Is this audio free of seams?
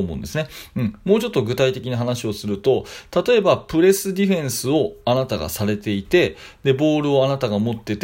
yes; 0 cuts

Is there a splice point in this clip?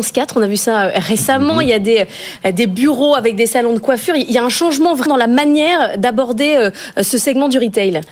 yes; 1 cut; at 5.1 s

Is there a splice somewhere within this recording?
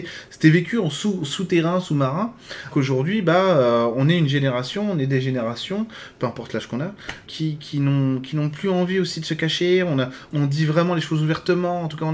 yes; 3 cuts; at 2.7 s, 7.3 s, 10.3 s

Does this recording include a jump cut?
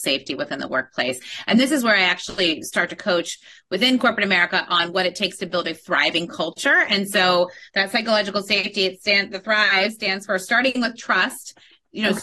no; 0 cuts

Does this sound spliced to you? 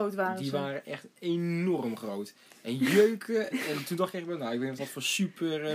yes; 2 cuts; at 3.5 s, 4.8 s

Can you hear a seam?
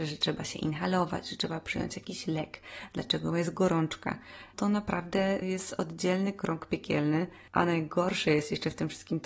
no; 0 cuts

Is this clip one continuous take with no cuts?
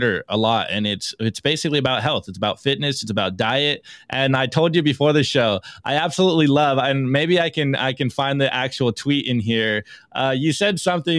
yes; 0 cuts

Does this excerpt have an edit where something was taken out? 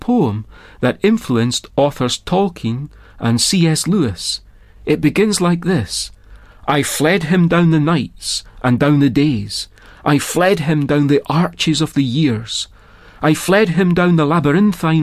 no; 0 cuts

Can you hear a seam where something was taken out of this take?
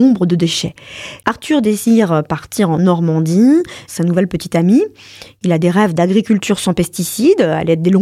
yes; 2 cuts; at 1.2 s, 3.9 s

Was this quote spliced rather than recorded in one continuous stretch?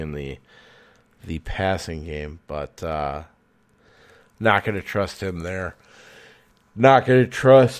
no; 0 cuts

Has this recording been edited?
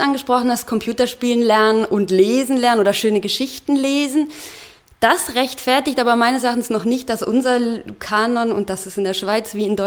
no; 0 cuts

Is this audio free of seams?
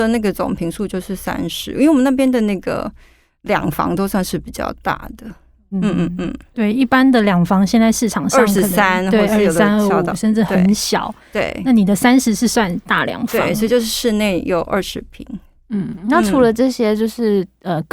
yes; 0 cuts

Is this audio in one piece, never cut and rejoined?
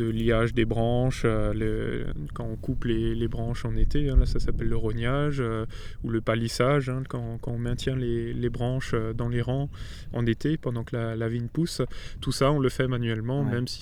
yes; 0 cuts

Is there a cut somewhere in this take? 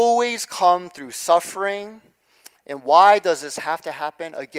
no; 0 cuts

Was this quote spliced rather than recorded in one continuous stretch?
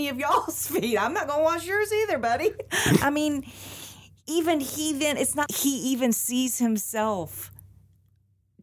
yes; 1 cut; at 5.5 s

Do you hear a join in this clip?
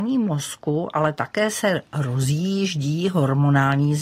no; 0 cuts

